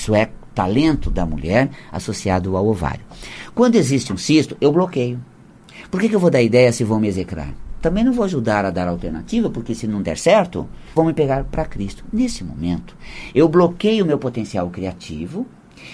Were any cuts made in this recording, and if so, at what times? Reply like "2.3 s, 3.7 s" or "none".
11.0 s